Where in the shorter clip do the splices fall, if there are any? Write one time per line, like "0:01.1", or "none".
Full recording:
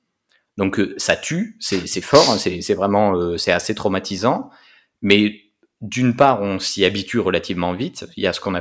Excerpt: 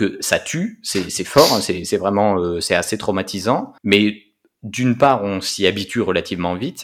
0:03.8